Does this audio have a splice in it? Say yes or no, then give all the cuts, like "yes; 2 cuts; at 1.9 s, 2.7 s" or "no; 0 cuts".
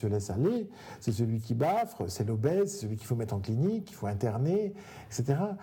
no; 0 cuts